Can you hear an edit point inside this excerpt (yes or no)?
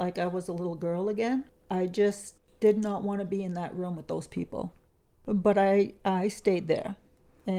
no